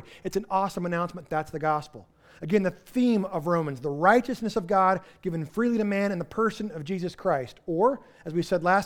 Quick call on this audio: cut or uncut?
uncut